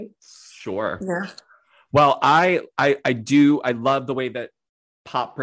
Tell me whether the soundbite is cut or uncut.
uncut